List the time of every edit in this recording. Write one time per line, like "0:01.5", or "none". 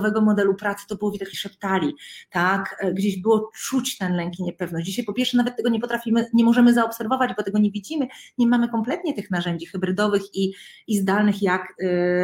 0:01.3